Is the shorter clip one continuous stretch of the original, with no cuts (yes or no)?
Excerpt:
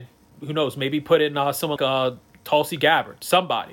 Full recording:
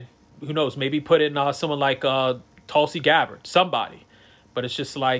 no